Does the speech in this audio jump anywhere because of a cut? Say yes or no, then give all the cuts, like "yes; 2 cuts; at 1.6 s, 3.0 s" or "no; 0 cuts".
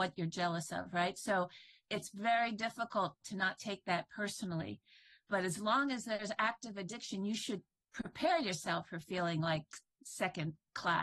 no; 0 cuts